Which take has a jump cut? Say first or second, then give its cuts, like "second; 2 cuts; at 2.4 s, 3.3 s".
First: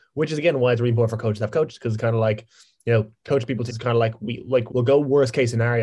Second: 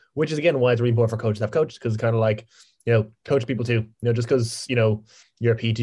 first; 2 cuts; at 3.7 s, 4.7 s